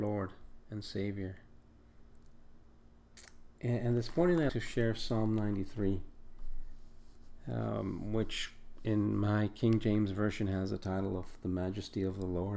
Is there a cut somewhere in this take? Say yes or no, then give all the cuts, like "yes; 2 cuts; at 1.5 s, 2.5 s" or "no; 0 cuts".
yes; 1 cut; at 4.5 s